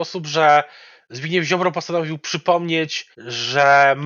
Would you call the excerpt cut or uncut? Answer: cut